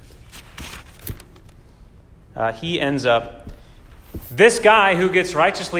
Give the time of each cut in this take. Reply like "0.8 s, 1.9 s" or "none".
2.2 s

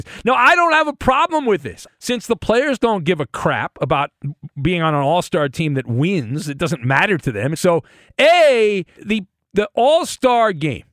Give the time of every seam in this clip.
1.9 s, 7.5 s, 9.0 s

